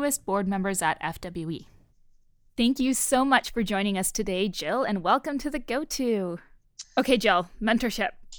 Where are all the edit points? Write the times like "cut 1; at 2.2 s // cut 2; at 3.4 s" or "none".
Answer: cut 1; at 6.8 s